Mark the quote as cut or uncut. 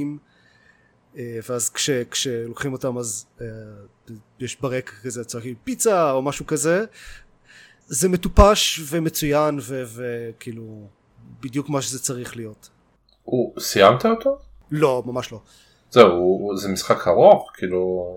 uncut